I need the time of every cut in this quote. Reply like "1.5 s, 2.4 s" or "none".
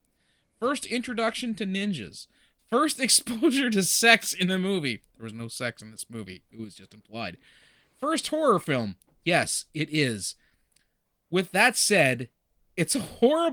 none